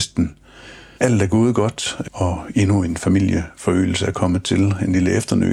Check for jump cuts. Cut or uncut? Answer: cut